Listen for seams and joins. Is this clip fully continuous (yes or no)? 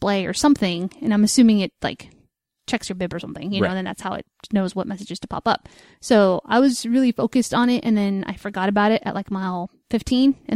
yes